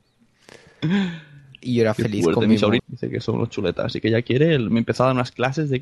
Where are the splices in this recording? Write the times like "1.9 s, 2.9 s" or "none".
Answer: 2.8 s